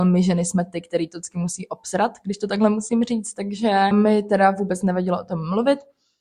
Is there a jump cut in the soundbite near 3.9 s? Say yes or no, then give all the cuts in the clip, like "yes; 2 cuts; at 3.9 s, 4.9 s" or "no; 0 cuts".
yes; 1 cut; at 3.9 s